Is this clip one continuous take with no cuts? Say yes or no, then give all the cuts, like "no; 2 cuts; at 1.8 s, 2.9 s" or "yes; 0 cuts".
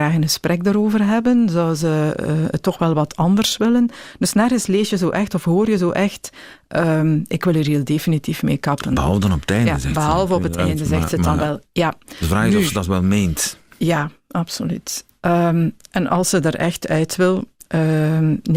yes; 0 cuts